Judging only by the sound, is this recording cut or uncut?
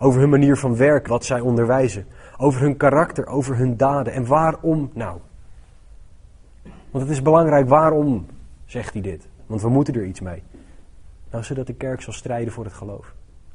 cut